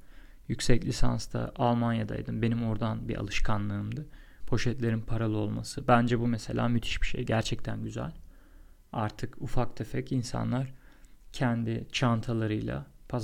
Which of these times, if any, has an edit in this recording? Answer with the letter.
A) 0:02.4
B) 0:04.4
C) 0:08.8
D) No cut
B